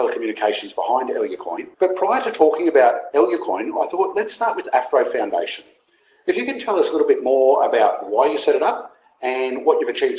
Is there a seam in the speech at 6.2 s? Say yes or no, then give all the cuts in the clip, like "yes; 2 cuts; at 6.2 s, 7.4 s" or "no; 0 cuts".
no; 1 cut; at 1.7 s